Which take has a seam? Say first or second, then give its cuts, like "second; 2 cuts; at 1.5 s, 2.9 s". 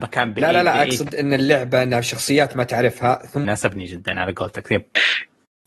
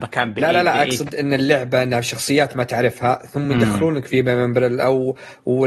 first; 1 cut; at 3.4 s